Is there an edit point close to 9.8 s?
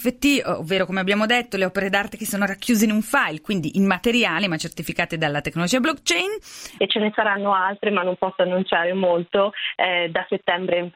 no; 1 cut; at 6.8 s

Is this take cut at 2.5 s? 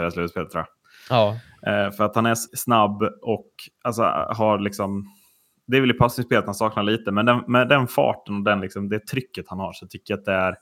yes; 1 cut; at 2.5 s

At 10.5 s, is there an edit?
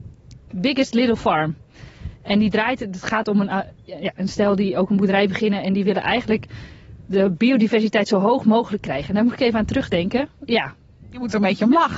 yes; 1 cut; at 10.5 s

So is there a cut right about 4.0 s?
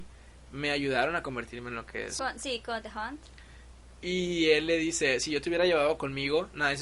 no; 1 cut; at 2.2 s

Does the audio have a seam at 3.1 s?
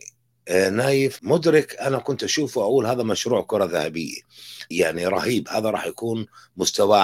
no; 2 cuts; at 1.2 s, 4.7 s

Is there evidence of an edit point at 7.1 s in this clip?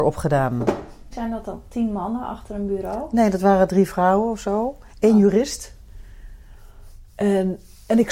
no; 1 cut; at 1.1 s

